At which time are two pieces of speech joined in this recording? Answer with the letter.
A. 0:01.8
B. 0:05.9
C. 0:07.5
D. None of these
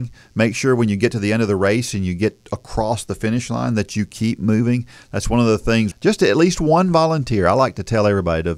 B